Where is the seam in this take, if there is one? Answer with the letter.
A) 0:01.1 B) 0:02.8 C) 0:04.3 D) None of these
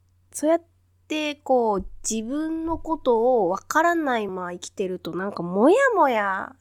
C